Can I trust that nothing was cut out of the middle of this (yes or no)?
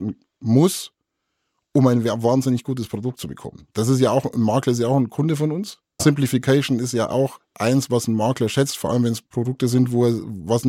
no